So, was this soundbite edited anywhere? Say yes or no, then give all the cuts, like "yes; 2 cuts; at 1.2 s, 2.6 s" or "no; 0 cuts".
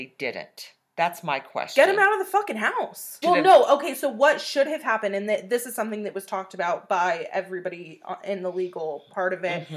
yes; 1 cut; at 3.2 s